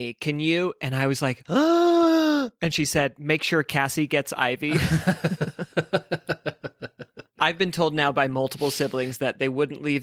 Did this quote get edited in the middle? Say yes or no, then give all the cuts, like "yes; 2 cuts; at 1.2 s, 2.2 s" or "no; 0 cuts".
no; 0 cuts